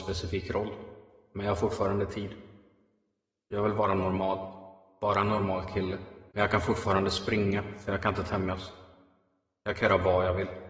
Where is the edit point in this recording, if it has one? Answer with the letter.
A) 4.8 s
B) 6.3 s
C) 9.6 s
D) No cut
B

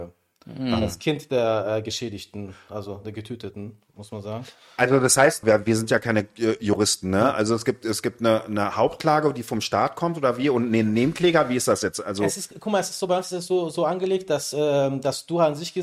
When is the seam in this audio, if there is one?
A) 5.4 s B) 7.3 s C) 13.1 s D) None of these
A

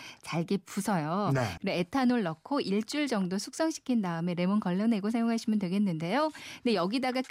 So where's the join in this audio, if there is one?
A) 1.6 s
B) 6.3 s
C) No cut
A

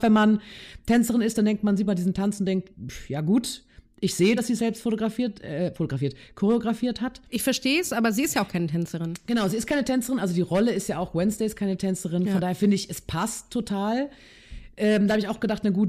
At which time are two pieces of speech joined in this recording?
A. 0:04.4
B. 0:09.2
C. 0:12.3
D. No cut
D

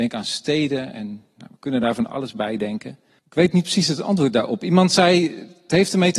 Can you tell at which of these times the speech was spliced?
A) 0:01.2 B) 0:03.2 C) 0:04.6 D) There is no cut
B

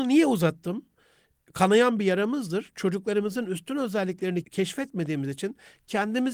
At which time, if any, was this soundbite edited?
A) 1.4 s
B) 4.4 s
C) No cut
B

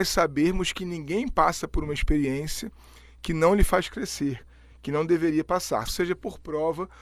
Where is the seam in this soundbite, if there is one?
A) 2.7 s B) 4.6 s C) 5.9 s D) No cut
C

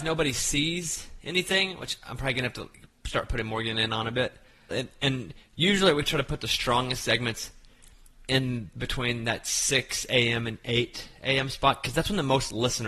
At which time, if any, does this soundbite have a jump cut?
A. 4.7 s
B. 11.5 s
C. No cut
A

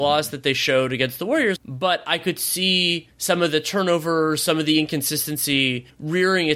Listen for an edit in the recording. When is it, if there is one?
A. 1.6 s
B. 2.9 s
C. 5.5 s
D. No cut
A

